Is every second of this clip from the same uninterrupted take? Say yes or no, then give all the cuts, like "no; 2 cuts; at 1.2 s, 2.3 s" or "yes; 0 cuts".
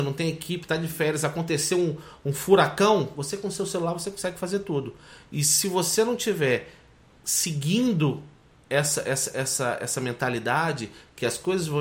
yes; 0 cuts